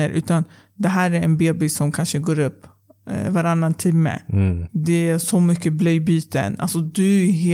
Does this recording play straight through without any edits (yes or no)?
yes